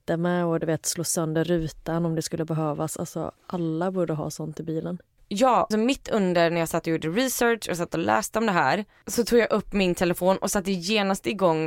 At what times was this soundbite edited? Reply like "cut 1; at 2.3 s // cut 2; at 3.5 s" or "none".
cut 1; at 5.7 s